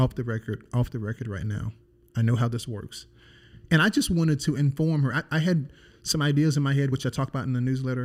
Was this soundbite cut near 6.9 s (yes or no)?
no